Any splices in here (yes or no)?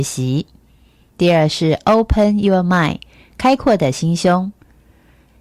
no